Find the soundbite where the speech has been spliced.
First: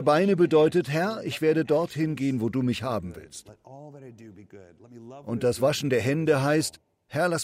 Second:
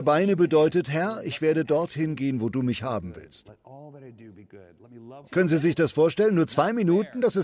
second; 1 cut; at 5.2 s

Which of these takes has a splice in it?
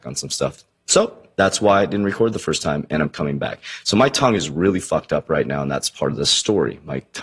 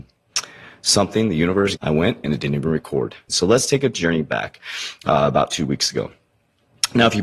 second; 2 cuts; at 1.8 s, 3.3 s

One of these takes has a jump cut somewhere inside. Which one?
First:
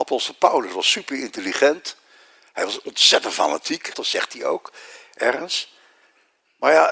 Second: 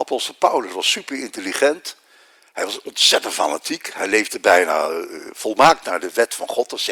first; 1 cut; at 3.9 s

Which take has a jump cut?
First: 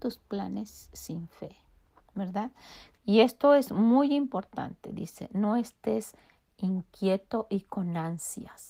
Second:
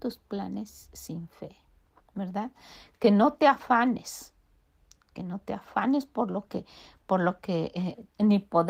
first; 1 cut; at 3.0 s

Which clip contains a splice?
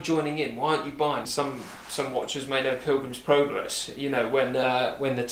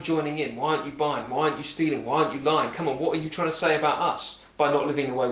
first; 1 cut; at 1.3 s

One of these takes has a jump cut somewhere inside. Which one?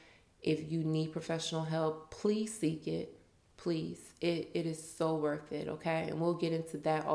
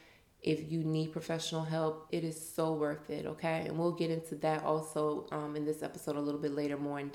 second; 1 cut; at 2.1 s

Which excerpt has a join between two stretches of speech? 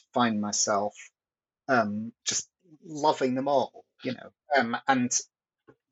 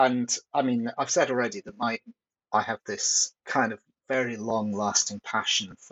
first; 1 cut; at 4.4 s

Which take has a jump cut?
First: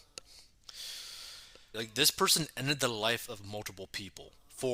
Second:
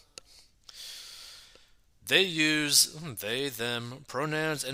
first; 1 cut; at 1.7 s

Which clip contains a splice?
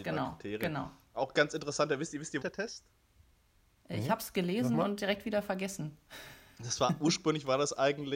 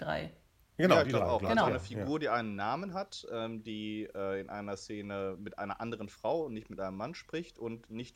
first; 1 cut; at 2.4 s

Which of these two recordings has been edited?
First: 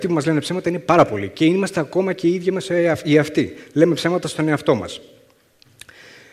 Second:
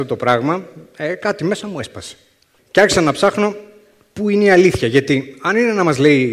second; 1 cut; at 2.6 s

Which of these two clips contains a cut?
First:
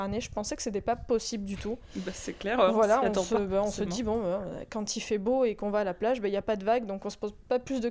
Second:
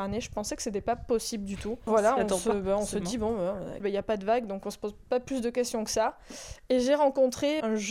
second; 2 cuts; at 1.9 s, 3.8 s

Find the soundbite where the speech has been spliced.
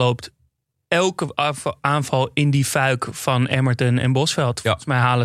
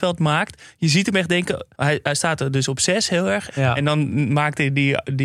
second; 2 cuts; at 1.7 s, 3.5 s

